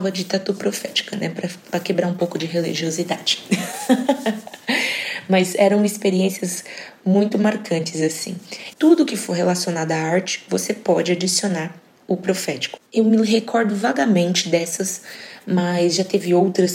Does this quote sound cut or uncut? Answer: cut